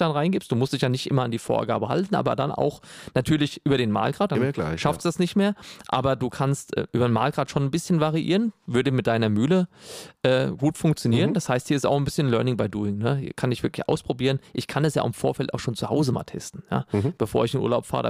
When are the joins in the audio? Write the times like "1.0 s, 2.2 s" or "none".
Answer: 4.3 s

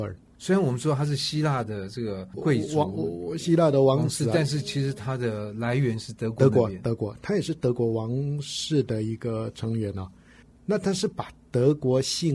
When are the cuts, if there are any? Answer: 10.5 s

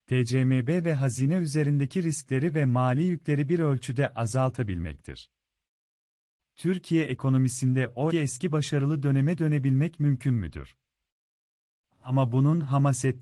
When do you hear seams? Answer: 8.1 s, 11.8 s

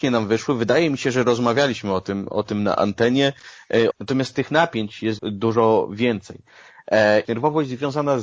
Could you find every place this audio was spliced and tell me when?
3.9 s, 5.2 s, 7.2 s

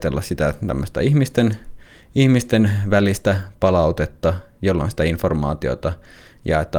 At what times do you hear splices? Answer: none

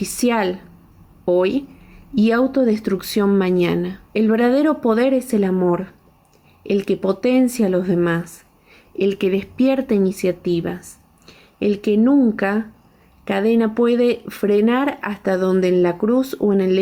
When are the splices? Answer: 4.1 s

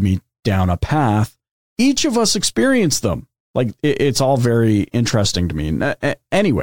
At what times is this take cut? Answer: 1.6 s, 3.4 s

